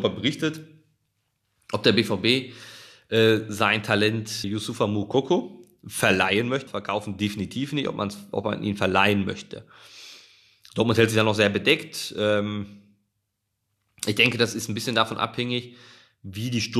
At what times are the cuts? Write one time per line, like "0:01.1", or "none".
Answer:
0:04.4
0:06.7